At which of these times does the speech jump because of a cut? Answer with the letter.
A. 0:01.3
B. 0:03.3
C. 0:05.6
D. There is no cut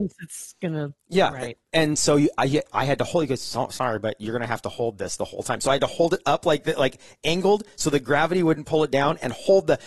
D